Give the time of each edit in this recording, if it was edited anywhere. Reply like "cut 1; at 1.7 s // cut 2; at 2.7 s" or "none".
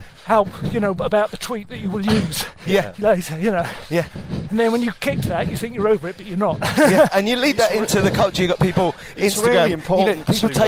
none